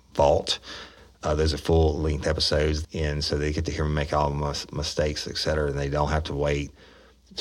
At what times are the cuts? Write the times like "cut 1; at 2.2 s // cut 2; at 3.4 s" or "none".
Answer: cut 1; at 2.8 s

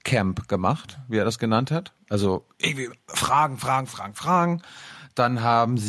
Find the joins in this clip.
cut 1; at 3.9 s

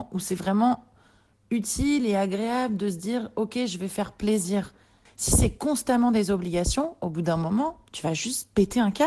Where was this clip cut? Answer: cut 1; at 5.1 s

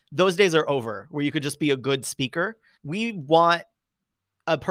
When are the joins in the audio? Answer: cut 1; at 2.7 s

